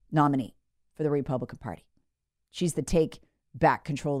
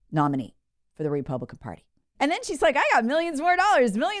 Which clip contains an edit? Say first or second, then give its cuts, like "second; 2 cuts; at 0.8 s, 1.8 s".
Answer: second; 1 cut; at 2.1 s